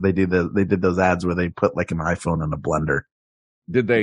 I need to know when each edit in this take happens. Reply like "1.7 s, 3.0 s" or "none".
none